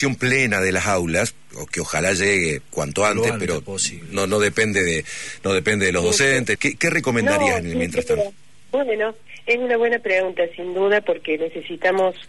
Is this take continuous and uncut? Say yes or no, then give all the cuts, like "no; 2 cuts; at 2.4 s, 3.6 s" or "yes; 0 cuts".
no; 1 cut; at 6.5 s